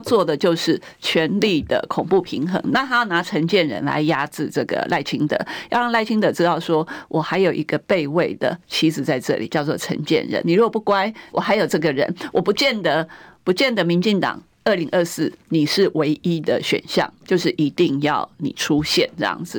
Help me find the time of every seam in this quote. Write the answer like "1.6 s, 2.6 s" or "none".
11.3 s